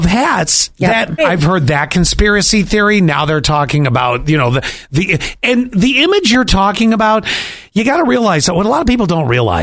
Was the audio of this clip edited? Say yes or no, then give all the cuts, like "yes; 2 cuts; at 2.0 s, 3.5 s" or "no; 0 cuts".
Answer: yes; 1 cut; at 1.2 s